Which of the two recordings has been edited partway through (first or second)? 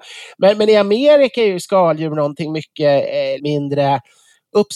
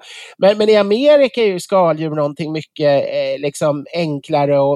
first